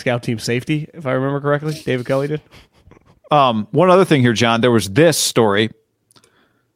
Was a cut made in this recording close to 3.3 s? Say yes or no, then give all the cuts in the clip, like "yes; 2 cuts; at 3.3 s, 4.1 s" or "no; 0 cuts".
yes; 1 cut; at 3.3 s